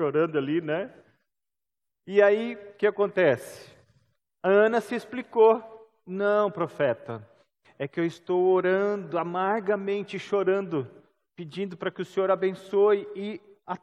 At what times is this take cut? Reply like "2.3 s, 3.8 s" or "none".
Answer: none